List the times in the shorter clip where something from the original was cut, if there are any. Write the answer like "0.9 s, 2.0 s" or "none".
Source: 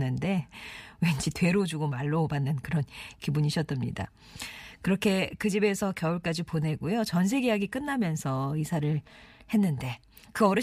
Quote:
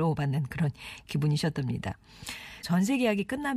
2.6 s